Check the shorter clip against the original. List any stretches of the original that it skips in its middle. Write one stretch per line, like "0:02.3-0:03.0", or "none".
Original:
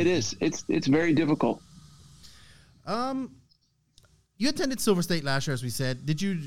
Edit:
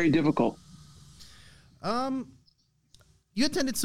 none